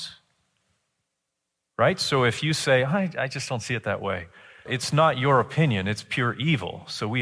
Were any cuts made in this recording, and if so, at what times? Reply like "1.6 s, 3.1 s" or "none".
4.7 s